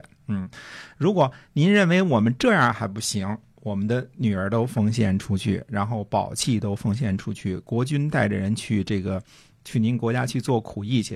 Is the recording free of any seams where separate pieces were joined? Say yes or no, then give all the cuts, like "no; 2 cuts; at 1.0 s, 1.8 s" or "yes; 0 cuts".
yes; 0 cuts